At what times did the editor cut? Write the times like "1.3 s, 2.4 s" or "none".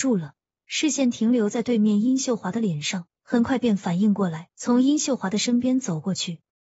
3.2 s, 4.5 s